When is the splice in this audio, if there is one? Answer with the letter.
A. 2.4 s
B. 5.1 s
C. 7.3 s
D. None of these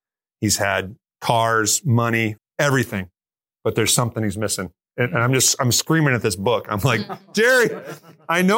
A